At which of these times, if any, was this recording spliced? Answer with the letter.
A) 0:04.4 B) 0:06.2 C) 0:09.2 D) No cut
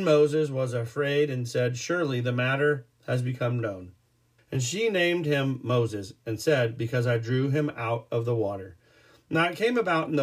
A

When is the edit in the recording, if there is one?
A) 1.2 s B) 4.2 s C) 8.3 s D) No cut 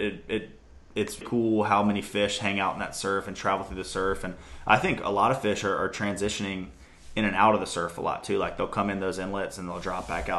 A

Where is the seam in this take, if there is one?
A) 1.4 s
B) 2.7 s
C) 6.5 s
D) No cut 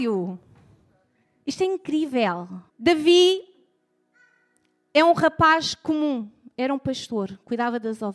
B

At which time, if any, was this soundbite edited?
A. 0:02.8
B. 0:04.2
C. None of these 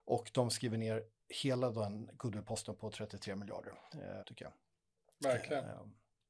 B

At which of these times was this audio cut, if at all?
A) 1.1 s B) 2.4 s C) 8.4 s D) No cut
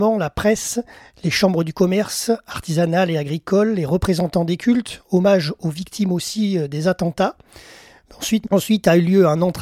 C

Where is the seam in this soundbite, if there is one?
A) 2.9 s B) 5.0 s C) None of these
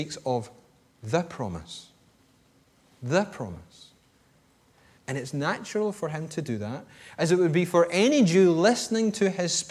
B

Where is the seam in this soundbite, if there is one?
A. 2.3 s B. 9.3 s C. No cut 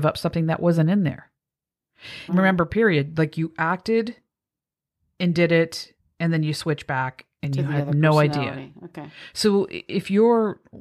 A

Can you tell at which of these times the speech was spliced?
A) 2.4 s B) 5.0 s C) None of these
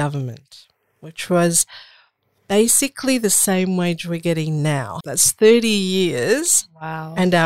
B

